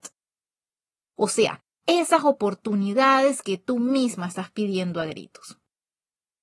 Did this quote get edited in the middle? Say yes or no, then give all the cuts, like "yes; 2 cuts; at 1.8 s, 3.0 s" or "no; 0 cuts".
yes; 1 cut; at 1.0 s